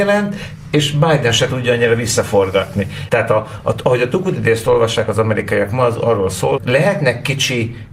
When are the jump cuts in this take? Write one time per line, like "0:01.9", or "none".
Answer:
0:03.1
0:06.6